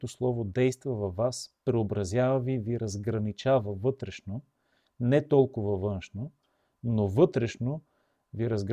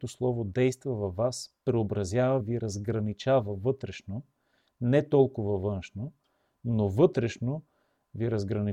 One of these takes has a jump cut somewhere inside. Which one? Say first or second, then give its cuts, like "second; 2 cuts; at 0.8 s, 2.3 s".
second; 1 cut; at 2.4 s